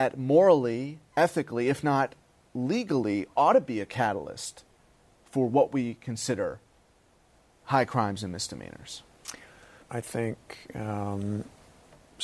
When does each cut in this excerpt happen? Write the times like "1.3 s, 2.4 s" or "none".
9.8 s